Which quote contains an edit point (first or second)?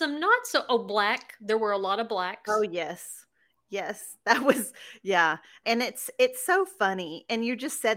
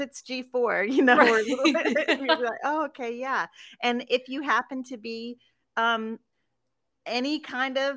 first